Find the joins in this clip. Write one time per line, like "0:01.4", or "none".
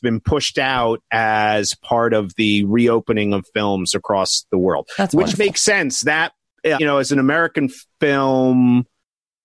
0:06.8